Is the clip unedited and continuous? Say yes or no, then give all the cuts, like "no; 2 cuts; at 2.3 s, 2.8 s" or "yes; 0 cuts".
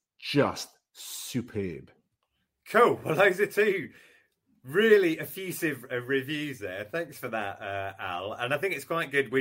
yes; 0 cuts